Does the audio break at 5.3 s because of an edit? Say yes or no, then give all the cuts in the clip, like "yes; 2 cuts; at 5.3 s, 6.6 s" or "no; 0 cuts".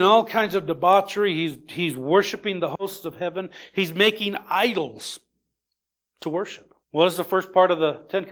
no; 1 cut; at 6.8 s